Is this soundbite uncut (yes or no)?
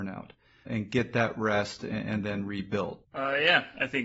no